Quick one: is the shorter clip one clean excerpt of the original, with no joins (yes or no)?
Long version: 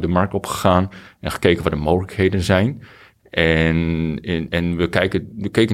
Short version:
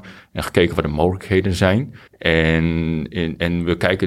no